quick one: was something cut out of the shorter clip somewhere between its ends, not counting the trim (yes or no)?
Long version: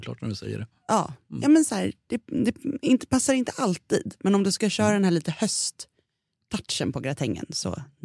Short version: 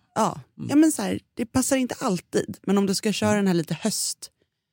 yes